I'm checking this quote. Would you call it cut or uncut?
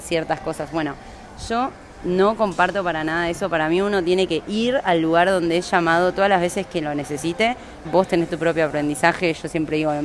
cut